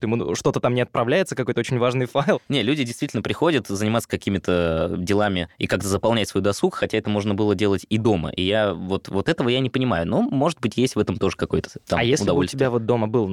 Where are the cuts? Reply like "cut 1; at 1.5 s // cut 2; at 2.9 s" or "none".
none